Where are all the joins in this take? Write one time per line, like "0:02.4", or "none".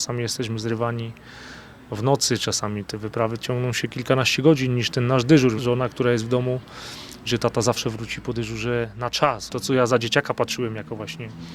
0:05.6
0:07.2

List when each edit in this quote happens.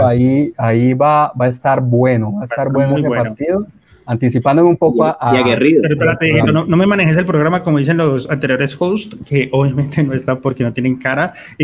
none

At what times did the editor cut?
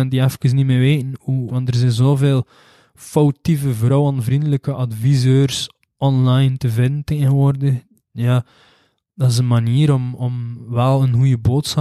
0:01.5

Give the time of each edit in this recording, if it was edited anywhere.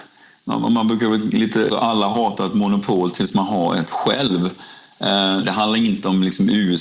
0:01.7
0:05.4

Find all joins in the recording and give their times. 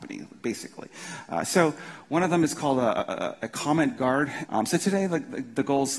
0:04.4

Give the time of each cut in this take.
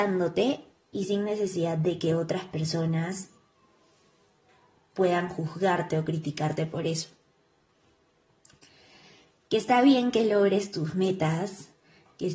none

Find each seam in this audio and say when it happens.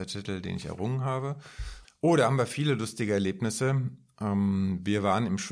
0:01.8

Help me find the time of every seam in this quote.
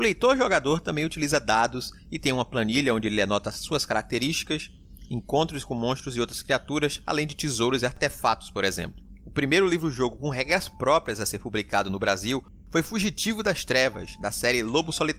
none

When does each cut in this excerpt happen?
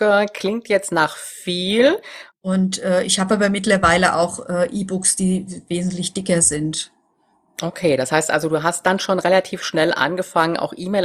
0:02.3

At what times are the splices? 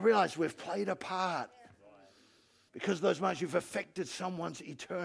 0:02.7

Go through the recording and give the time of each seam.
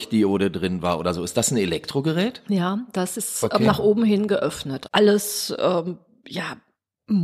0:04.9

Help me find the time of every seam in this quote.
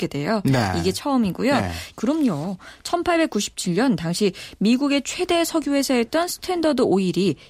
0:01.9

